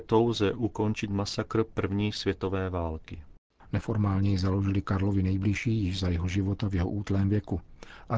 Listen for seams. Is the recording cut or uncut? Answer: cut